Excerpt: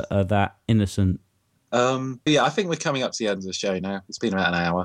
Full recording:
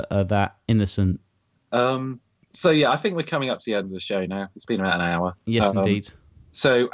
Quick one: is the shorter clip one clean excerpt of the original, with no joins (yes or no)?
no